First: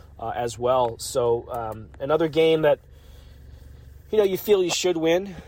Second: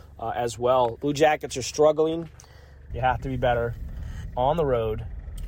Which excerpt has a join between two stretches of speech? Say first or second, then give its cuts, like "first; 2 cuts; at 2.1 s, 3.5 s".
second; 2 cuts; at 1.0 s, 2.9 s